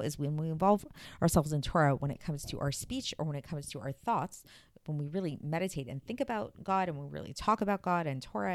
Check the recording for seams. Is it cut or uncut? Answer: uncut